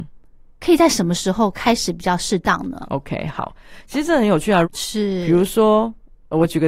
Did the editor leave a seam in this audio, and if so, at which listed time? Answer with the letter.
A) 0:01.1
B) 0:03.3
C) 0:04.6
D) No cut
C